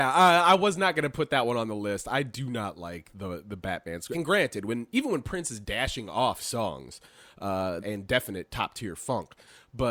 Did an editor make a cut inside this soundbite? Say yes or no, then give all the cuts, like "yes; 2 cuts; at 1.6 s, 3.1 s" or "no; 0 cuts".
yes; 2 cuts; at 4.1 s, 7.8 s